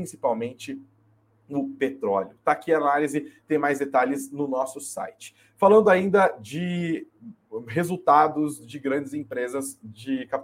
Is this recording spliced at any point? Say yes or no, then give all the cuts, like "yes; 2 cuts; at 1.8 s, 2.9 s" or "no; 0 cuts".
no; 0 cuts